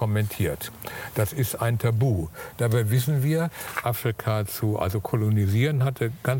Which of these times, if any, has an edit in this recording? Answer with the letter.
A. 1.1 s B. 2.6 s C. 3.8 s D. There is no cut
C